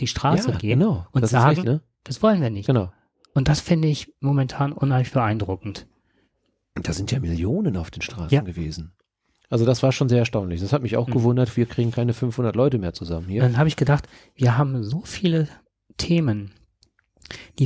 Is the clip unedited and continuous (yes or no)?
no